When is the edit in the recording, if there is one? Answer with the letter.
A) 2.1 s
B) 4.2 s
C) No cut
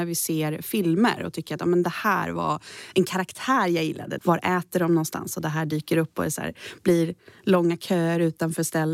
B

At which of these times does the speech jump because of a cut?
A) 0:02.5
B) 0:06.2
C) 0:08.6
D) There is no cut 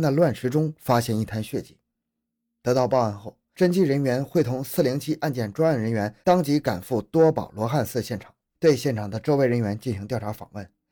C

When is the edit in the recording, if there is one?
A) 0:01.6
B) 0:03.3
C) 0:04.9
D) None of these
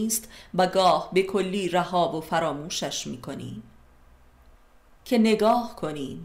C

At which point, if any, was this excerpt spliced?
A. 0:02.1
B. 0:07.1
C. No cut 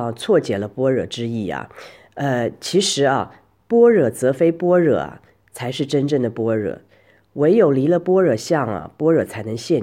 C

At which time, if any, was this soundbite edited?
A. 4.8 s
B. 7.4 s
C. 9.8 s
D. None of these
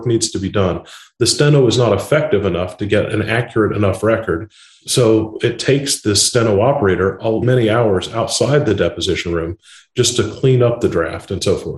B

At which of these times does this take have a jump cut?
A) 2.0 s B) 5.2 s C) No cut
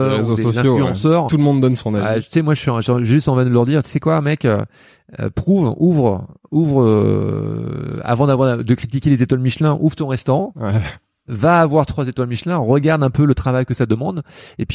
C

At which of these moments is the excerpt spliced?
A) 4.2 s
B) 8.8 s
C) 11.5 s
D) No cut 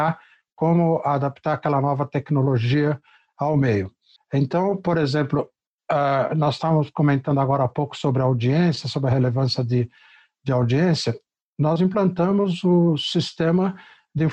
A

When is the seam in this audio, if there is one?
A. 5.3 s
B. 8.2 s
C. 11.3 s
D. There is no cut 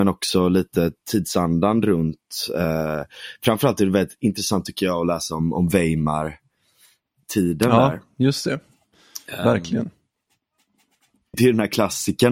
C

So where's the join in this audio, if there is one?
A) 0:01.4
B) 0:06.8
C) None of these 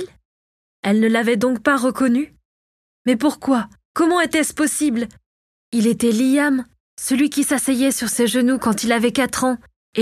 B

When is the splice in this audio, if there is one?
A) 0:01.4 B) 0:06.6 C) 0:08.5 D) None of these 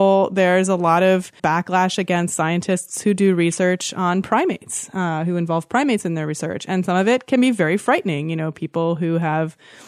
A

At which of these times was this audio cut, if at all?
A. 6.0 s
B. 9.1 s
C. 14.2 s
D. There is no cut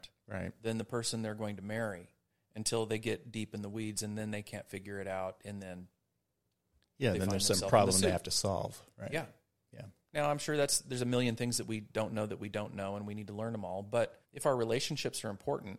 C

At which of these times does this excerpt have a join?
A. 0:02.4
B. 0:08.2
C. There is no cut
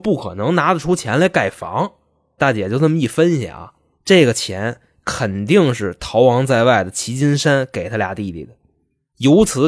A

